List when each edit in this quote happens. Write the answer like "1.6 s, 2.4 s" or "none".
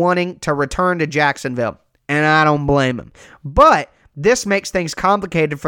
none